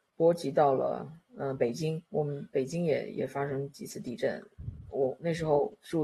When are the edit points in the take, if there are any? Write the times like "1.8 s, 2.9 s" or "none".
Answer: 2.1 s